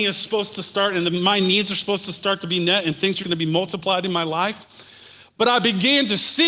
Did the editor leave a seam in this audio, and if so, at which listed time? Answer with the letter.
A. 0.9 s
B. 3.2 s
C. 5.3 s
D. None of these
B